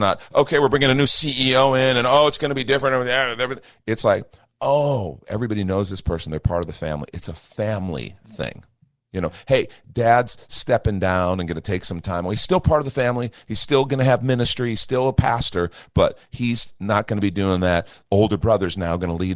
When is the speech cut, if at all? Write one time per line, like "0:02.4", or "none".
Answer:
none